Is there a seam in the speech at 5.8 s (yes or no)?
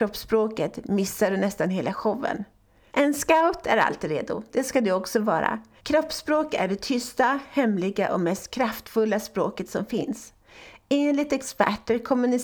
yes